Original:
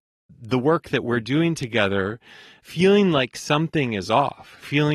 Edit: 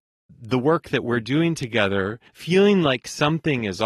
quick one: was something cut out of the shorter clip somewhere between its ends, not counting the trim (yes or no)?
yes